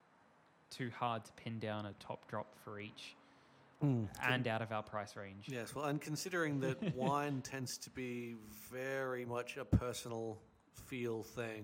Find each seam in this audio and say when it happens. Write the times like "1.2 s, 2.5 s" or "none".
none